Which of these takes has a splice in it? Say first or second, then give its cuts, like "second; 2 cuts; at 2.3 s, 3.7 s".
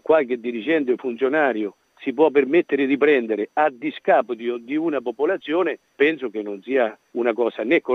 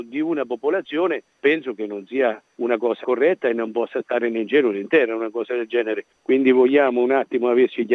second; 1 cut; at 3.0 s